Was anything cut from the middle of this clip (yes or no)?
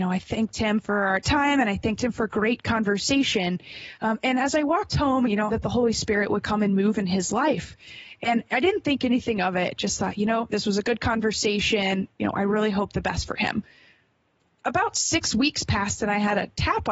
yes